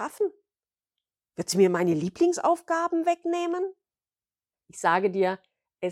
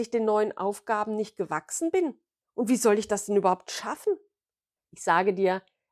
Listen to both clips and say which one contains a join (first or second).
second